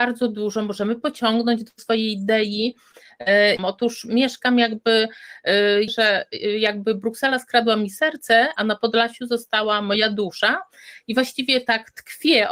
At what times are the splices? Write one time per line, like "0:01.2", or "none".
0:03.6
0:05.9